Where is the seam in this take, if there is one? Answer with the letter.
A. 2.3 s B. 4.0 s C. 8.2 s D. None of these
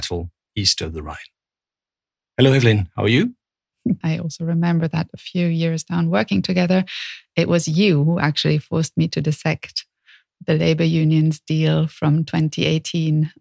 B